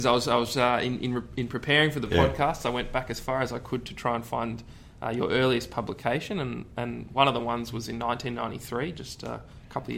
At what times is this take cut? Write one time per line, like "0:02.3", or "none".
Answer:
none